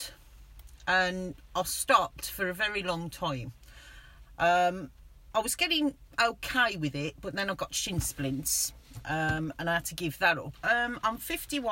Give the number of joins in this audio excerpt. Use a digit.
2